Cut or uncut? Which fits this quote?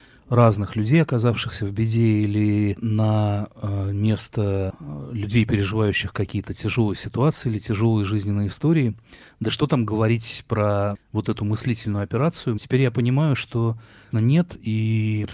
cut